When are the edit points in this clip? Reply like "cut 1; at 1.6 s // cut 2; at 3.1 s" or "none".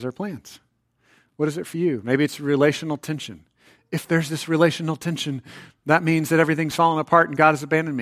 none

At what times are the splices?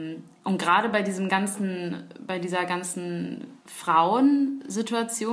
cut 1; at 3.6 s

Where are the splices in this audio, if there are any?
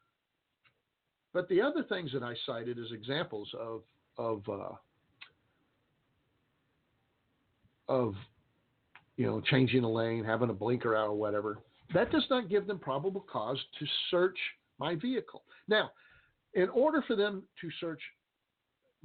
none

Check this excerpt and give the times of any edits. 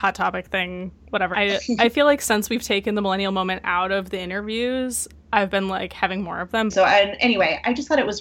cut 1; at 1.3 s // cut 2; at 6.7 s

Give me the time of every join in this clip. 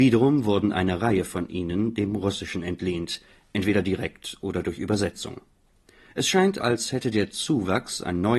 cut 1; at 6.6 s

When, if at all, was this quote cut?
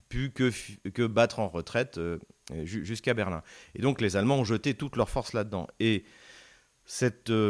none

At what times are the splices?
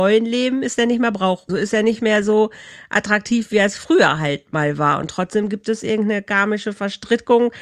cut 1; at 1.5 s

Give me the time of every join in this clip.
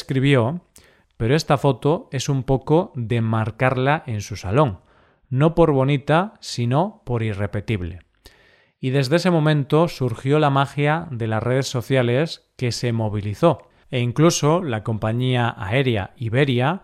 cut 1; at 1.0 s

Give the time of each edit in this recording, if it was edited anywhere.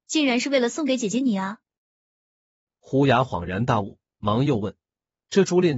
none

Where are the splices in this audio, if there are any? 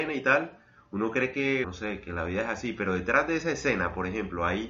cut 1; at 1.6 s

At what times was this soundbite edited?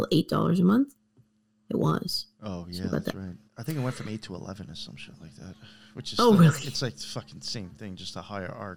cut 1; at 3.5 s

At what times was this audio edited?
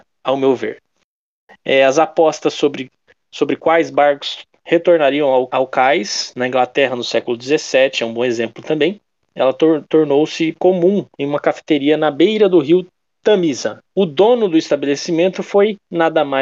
cut 1; at 5.5 s // cut 2; at 11.1 s // cut 3; at 13.8 s

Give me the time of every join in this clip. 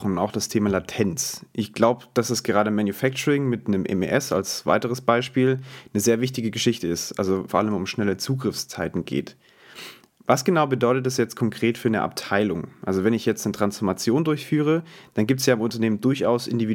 cut 1; at 7.5 s

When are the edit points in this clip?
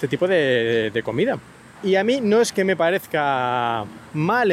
cut 1; at 1.8 s

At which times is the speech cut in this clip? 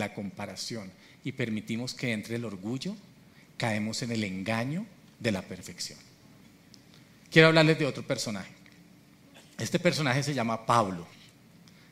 none

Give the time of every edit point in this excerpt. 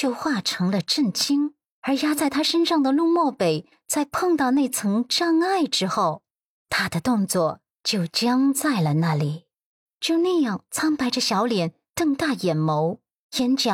cut 1; at 1.7 s // cut 2; at 9.9 s

